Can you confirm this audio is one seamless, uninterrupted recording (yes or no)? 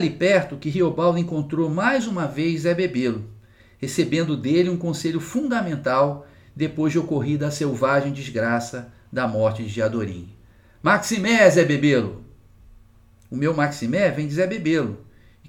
yes